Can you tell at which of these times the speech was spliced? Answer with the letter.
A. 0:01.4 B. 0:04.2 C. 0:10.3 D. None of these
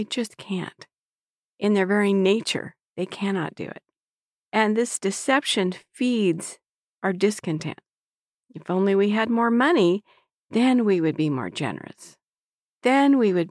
D